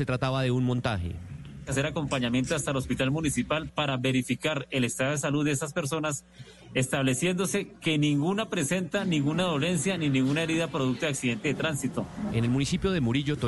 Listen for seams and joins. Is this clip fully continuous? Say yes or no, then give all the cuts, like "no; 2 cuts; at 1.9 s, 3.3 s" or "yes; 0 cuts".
no; 1 cut; at 12.3 s